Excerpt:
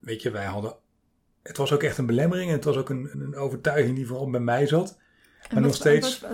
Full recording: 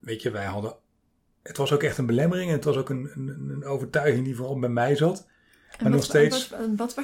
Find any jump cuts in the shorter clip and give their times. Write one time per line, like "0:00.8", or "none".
0:03.1